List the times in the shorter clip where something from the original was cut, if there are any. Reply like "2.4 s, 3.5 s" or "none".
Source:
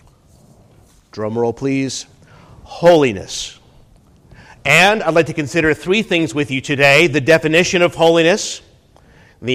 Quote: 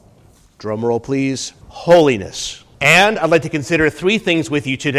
1.6 s, 2.7 s